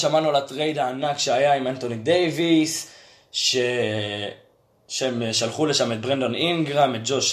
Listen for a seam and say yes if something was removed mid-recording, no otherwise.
no